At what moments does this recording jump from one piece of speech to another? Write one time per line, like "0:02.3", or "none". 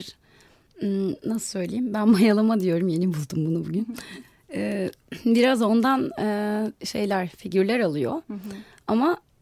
none